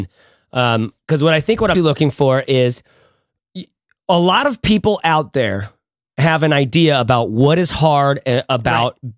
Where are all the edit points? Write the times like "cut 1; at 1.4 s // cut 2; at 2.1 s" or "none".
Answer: cut 1; at 1.7 s